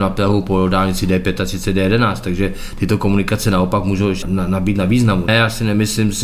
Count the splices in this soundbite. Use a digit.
2